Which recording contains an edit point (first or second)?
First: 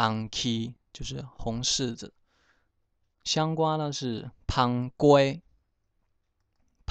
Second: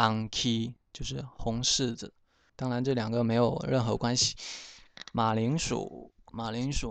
second